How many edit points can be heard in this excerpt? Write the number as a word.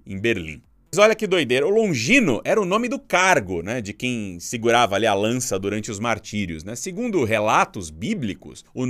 one